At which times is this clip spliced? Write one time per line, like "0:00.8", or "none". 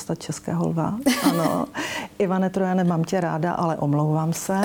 none